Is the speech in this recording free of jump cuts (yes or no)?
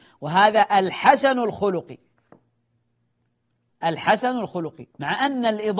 no